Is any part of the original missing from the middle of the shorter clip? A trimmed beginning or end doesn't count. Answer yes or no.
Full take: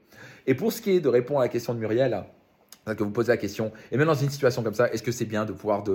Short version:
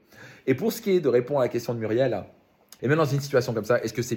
yes